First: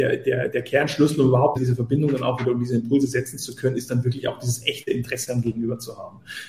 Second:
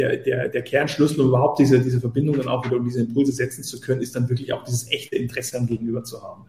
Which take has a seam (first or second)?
first